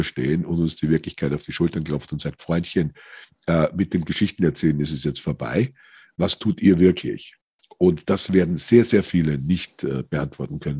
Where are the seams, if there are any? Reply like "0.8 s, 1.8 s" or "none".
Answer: none